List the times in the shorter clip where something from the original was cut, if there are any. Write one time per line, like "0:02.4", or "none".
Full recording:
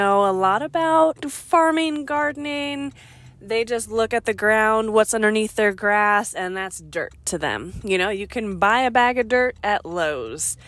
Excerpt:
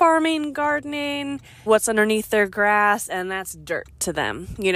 0:01.7